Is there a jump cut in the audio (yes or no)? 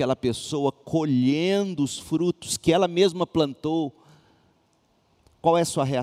no